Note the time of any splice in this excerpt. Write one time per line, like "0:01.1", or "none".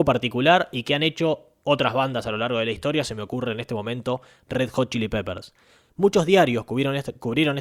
0:05.9